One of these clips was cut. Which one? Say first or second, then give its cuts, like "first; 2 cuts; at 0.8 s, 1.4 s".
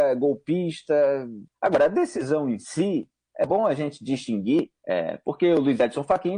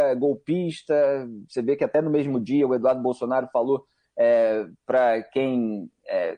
first; 2 cuts; at 1.5 s, 4.8 s